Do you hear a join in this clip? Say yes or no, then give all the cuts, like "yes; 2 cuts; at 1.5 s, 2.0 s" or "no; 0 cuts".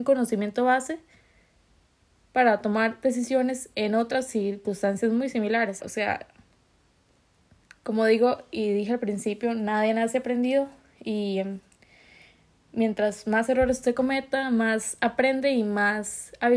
yes; 1 cut; at 5.8 s